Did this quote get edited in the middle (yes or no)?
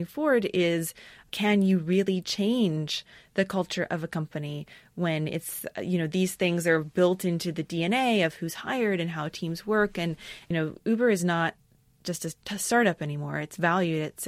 no